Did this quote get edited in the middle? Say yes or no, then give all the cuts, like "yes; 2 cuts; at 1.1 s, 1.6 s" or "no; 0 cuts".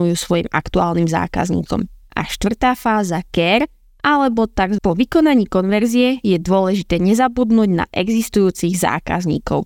yes; 2 cuts; at 2.1 s, 4.8 s